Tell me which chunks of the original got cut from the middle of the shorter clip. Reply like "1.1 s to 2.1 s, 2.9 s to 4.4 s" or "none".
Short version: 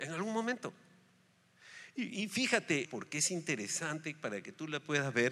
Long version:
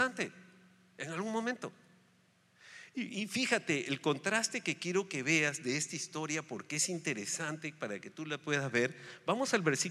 3.8 s to 6.4 s